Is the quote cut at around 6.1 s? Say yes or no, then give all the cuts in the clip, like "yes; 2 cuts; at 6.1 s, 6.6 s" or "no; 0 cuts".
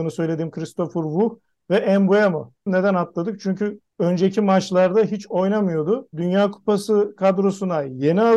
yes; 2 cuts; at 2.7 s, 6.1 s